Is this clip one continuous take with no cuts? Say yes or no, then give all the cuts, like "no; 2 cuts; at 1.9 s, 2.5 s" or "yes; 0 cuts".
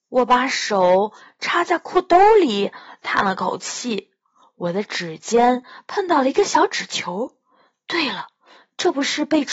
yes; 0 cuts